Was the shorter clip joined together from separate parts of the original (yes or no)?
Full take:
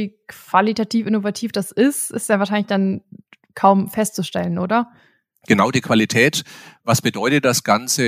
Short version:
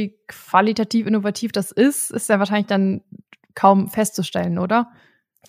no